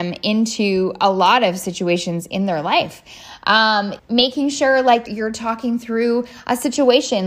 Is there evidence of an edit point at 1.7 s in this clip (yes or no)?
no